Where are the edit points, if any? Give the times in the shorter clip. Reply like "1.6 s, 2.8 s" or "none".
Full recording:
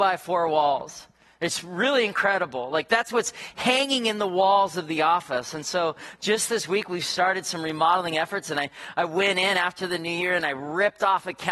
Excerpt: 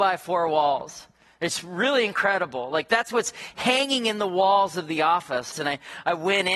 5.5 s